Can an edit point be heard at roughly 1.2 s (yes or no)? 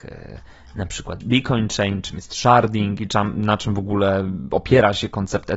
yes